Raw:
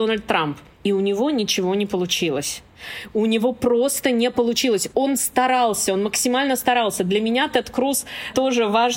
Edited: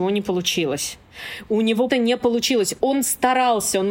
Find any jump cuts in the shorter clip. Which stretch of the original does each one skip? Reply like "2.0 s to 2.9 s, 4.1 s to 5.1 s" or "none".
3.5 s to 4.0 s